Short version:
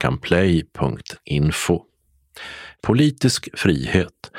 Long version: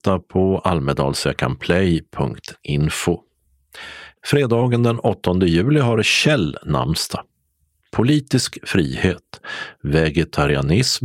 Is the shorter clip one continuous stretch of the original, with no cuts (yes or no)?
no